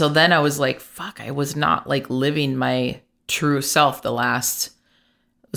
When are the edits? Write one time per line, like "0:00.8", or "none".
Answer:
none